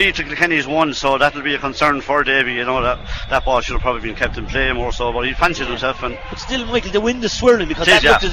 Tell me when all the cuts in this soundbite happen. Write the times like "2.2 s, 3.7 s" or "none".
none